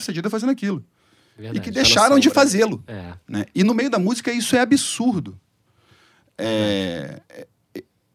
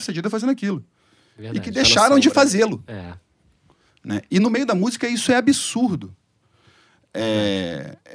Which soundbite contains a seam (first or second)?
first